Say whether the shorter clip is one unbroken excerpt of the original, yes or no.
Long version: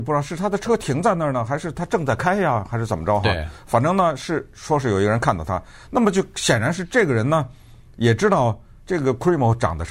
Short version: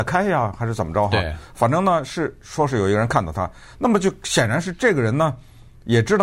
yes